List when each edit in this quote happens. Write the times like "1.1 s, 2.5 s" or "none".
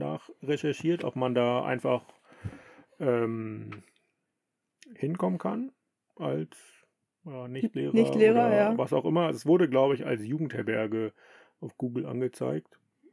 none